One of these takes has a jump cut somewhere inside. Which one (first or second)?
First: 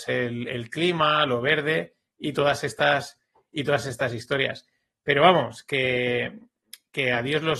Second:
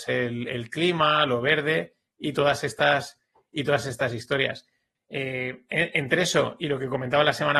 second